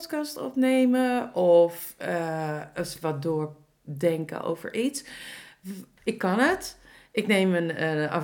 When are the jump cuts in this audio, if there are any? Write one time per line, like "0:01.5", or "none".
0:06.0